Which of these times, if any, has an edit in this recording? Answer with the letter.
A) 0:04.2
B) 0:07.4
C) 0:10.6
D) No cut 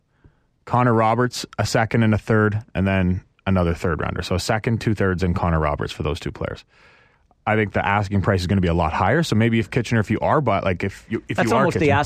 D